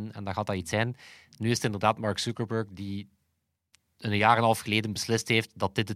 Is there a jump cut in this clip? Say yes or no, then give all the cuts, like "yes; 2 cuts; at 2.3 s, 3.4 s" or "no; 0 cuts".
no; 0 cuts